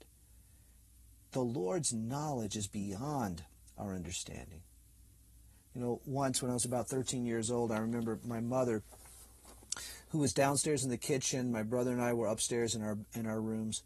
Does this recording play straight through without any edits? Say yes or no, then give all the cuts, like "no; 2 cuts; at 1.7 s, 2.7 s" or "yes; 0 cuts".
yes; 0 cuts